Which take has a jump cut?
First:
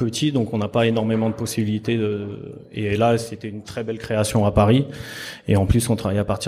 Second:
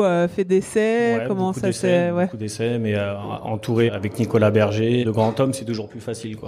second; 2 cuts; at 3.9 s, 5.0 s

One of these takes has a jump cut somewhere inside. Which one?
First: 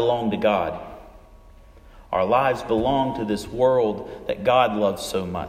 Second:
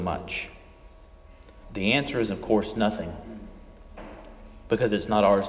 second; 1 cut; at 1.6 s

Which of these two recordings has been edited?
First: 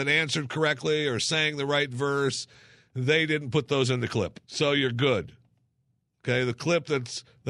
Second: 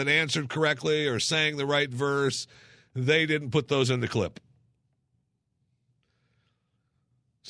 first; 1 cut; at 4.4 s

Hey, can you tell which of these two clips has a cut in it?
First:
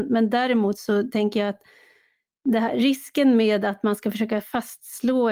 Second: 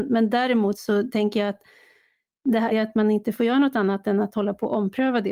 second; 1 cut; at 2.7 s

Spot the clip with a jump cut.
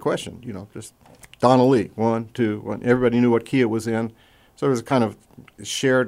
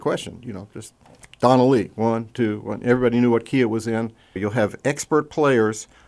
second; 1 cut; at 4.4 s

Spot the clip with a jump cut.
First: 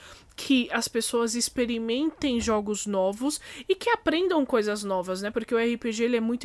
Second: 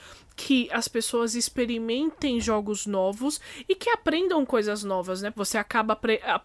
second; 1 cut; at 5.3 s

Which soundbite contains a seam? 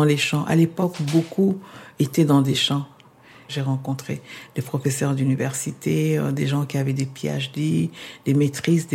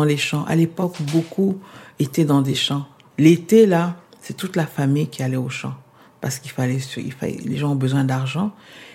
second; 1 cut; at 3.1 s

